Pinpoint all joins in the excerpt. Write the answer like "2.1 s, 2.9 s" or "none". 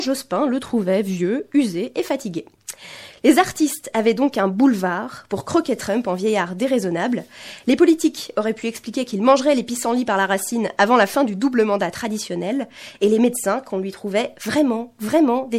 none

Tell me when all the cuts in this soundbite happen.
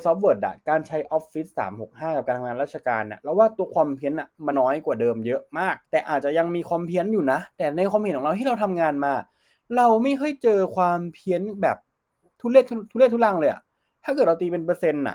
4.5 s, 5.8 s

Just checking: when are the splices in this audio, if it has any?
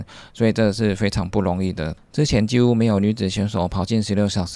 none

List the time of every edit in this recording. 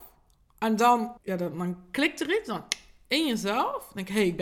1.2 s

